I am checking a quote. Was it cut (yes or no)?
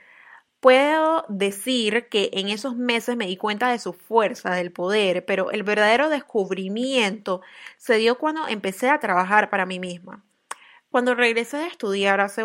no